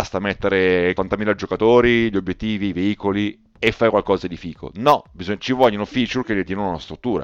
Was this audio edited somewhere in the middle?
yes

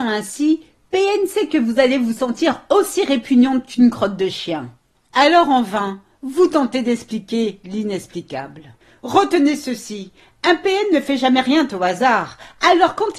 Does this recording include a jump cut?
yes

